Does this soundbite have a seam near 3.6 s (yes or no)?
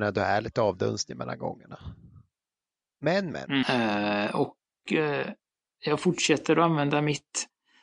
yes